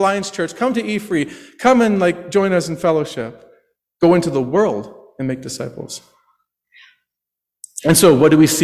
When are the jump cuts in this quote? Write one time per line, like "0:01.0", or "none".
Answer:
0:03.9